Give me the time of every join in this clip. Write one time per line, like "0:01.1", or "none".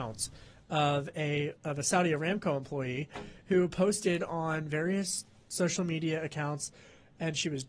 0:01.5